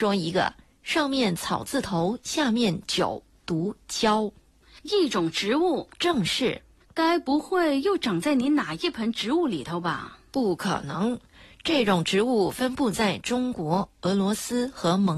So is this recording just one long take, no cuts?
yes; 0 cuts

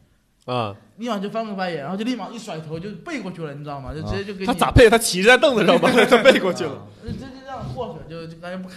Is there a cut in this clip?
no; 0 cuts

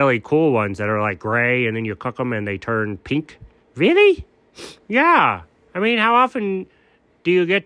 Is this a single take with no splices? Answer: no; 1 cut; at 3.6 s

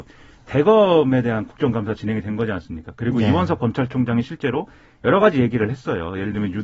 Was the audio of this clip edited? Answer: no; 0 cuts

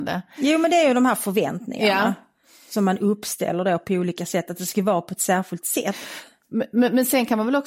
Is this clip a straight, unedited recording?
yes; 0 cuts

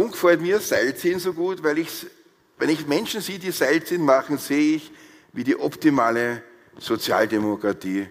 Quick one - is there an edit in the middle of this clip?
no; 0 cuts

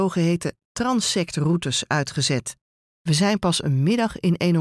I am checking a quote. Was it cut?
yes; 1 cut; at 2.9 s

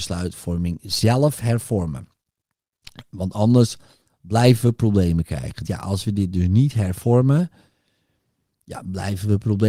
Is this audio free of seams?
no; 1 cut; at 5.6 s

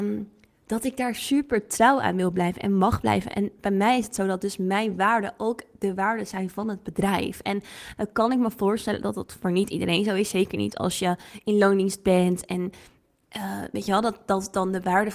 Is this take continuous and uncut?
yes; 0 cuts

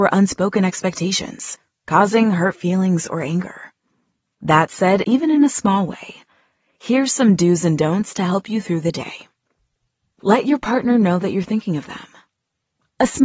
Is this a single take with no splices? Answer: no; 1 cut; at 5.0 s

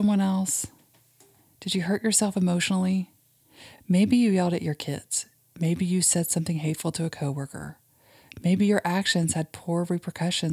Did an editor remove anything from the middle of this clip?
no; 0 cuts

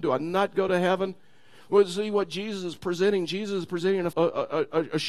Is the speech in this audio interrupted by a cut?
yes; 1 cut; at 4.1 s

